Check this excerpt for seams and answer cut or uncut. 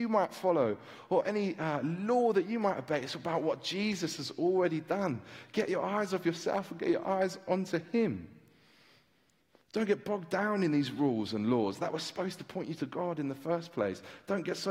uncut